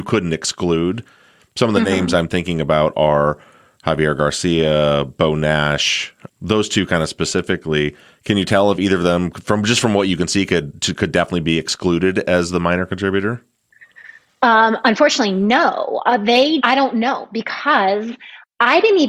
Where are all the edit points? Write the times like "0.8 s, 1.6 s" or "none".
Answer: 6.3 s, 16.6 s